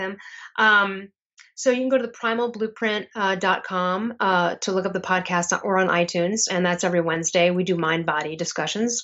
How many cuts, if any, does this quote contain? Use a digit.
0